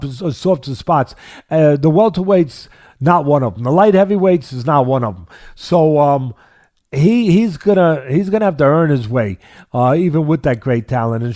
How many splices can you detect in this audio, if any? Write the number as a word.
one